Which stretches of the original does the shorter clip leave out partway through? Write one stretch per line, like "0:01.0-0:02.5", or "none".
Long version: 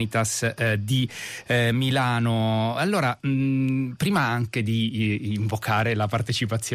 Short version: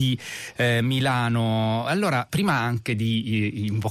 0:03.2-0:04.0